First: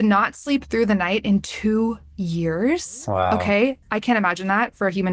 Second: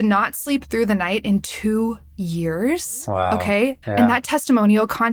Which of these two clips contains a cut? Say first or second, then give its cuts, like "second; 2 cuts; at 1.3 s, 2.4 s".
second; 1 cut; at 3.8 s